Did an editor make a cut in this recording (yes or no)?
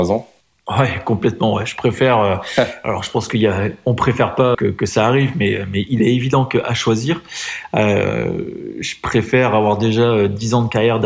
yes